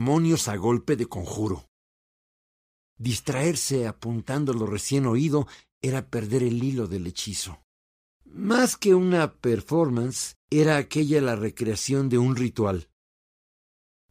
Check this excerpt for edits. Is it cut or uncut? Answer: cut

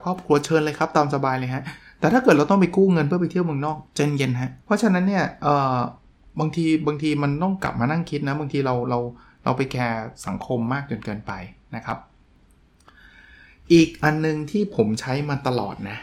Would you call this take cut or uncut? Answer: cut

